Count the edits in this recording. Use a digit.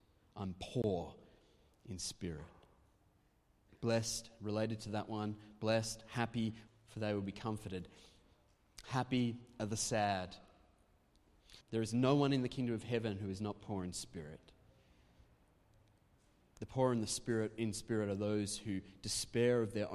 3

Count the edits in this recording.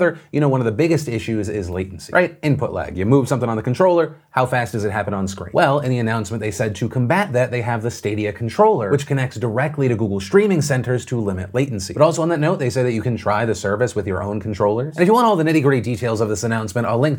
0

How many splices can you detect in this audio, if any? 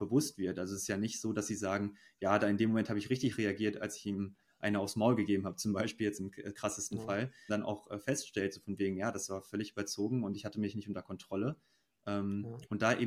1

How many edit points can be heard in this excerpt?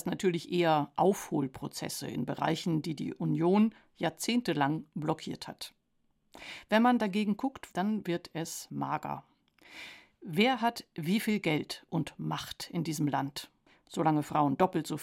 1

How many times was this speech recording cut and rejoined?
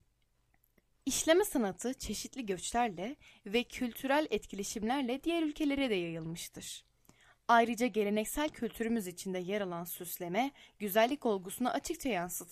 0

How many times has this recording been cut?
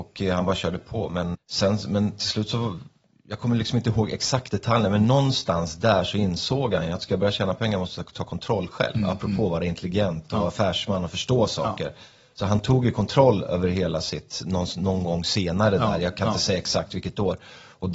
1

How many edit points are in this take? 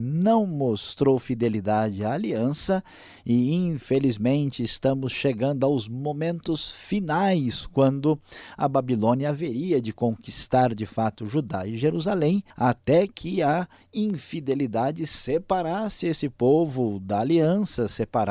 1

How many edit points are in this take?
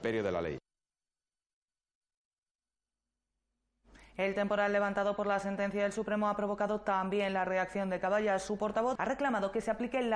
1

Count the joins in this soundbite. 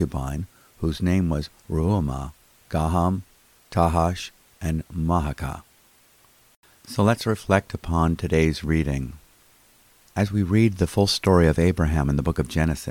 1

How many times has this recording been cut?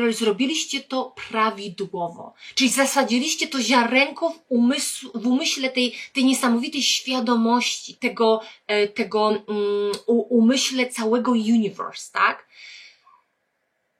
1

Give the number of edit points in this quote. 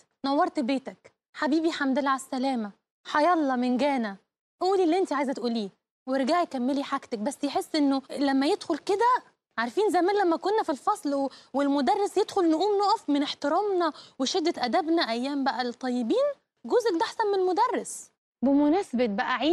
1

